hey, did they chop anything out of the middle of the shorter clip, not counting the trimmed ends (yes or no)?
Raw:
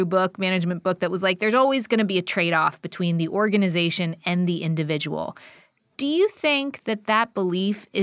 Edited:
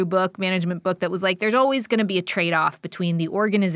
no